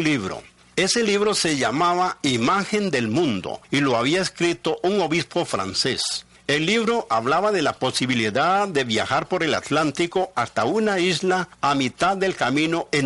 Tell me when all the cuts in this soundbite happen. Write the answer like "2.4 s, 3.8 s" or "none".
none